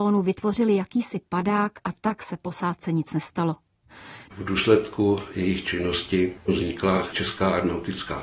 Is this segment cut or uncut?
cut